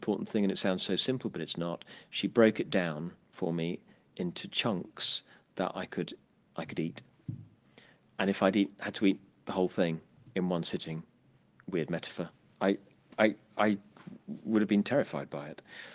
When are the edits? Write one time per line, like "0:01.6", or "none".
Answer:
none